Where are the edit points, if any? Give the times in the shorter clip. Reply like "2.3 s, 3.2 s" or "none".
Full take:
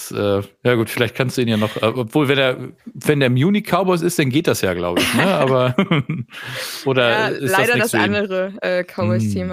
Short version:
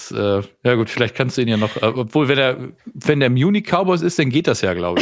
none